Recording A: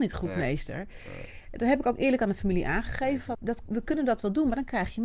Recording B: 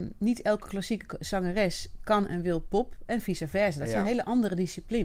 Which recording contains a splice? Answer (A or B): A